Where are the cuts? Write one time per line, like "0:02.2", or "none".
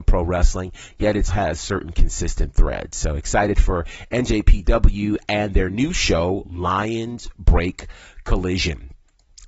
0:01.3